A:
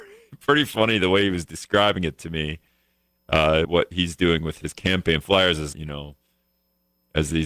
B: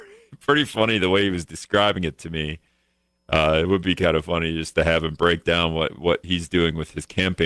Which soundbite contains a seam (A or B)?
A